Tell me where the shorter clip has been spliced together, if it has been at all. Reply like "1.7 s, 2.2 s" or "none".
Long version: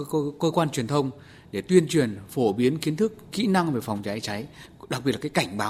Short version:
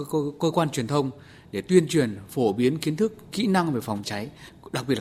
4.0 s